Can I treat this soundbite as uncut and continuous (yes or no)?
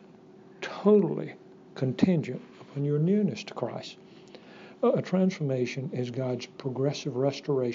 yes